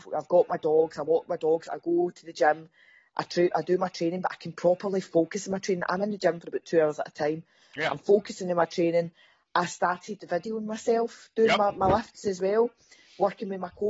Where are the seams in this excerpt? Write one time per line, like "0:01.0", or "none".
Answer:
none